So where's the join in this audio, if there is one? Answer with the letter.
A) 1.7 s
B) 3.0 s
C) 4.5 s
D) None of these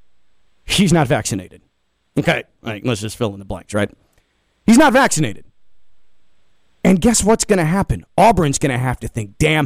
D